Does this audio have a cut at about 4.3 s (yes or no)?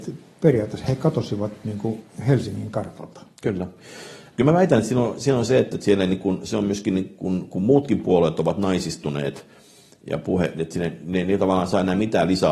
yes